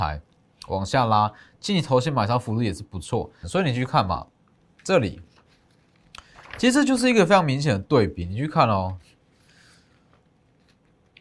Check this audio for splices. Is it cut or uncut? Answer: cut